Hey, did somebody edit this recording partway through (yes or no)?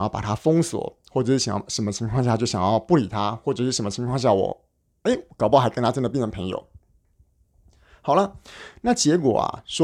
no